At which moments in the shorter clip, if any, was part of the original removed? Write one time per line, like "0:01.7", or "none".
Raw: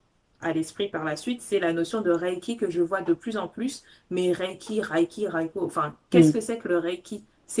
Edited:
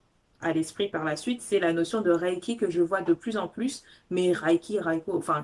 0:04.3